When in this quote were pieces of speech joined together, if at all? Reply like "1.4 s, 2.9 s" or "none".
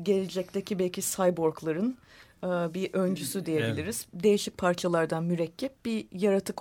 none